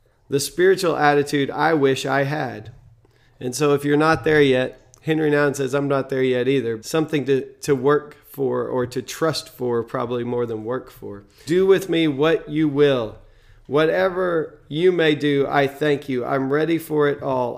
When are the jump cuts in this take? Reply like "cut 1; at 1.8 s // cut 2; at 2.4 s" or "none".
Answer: cut 1; at 6.8 s // cut 2; at 11.5 s